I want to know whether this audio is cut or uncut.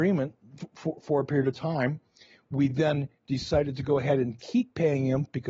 uncut